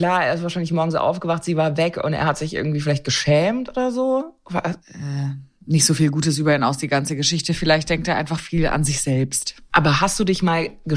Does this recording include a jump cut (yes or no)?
yes